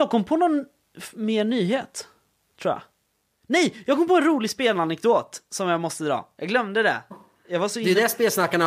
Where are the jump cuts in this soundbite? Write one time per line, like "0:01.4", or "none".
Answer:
none

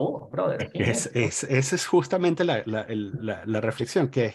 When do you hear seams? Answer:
none

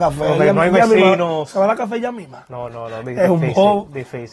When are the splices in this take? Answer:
none

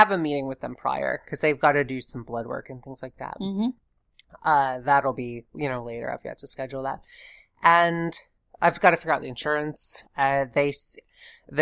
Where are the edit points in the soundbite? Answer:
0:05.5
0:10.0

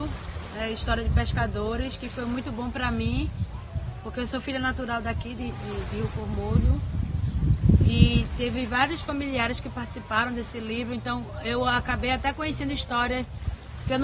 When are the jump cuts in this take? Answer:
none

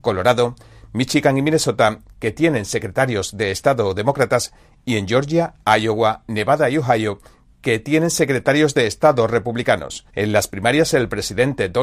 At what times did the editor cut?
0:10.1

